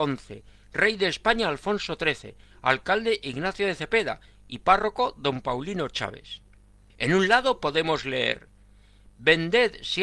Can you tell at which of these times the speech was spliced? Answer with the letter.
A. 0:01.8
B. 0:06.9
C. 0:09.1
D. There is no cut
B